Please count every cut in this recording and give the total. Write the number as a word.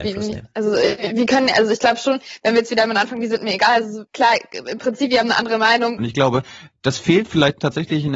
two